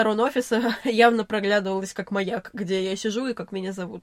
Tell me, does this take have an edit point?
no; 0 cuts

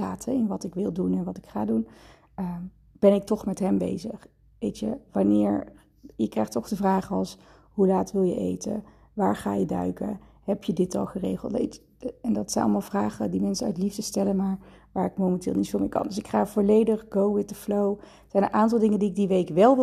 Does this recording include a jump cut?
no; 0 cuts

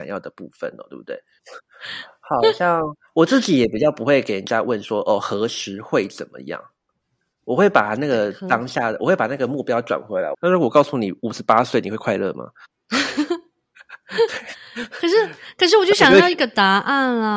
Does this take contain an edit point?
yes; 3 cuts; at 1.4 s, 10.3 s, 12.7 s

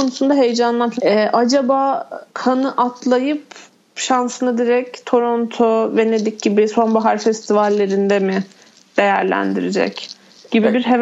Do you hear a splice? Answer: yes; 2 cuts; at 1.0 s, 2.3 s

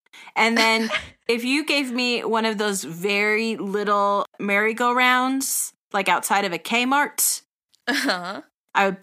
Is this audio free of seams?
yes; 0 cuts

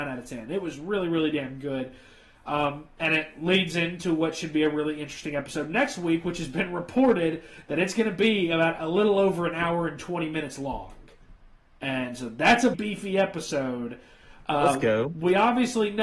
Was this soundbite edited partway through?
yes; 1 cut; at 12.7 s

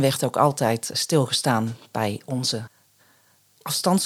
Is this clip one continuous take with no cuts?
no; 1 cut; at 0.9 s

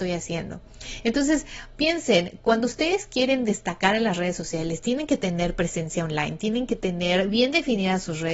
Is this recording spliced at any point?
no; 0 cuts

